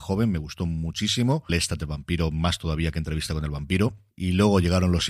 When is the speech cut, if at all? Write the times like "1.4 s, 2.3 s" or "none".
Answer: 1.5 s